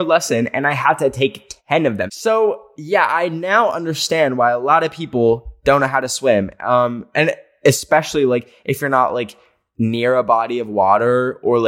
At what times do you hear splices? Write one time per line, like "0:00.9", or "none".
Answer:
0:02.1